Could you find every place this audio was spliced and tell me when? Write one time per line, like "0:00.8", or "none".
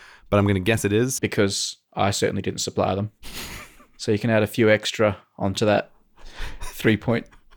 0:01.2